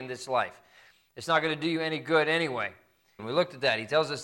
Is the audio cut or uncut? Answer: cut